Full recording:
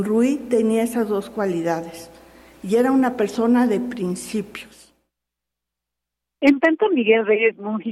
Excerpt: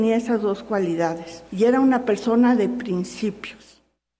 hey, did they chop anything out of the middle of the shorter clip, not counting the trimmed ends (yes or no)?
yes